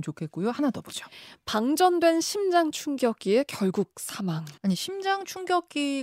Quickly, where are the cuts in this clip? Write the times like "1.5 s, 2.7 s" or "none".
4.6 s